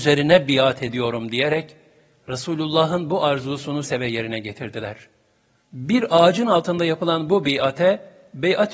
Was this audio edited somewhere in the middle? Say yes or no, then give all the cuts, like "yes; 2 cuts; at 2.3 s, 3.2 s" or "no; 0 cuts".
yes; 2 cuts; at 3.8 s, 5.6 s